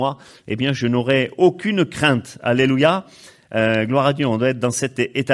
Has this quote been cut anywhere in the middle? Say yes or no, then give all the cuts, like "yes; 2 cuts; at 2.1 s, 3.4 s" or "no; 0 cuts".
no; 0 cuts